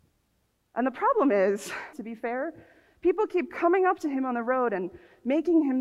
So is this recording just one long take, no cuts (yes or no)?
no